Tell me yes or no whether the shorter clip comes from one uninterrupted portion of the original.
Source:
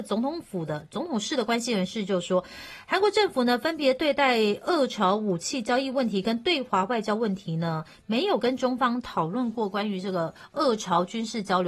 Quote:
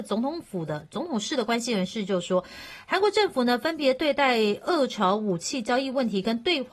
yes